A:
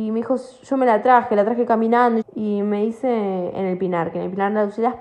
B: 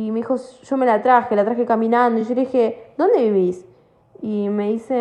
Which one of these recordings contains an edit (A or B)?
A